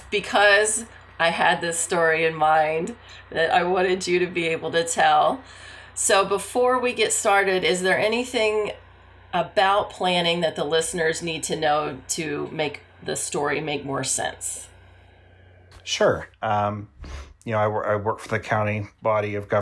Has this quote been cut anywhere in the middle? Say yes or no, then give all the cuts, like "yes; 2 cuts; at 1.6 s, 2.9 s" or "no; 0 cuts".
yes; 1 cut; at 16.3 s